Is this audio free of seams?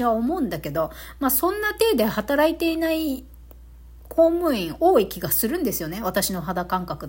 yes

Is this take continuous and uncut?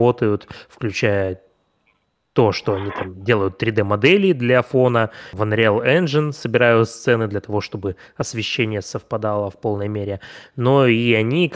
yes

